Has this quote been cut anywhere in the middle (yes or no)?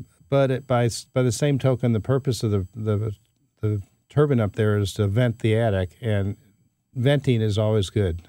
no